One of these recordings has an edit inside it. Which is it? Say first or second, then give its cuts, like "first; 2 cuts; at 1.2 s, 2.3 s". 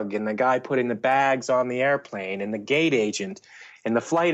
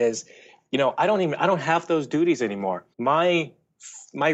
second; 1 cut; at 2.9 s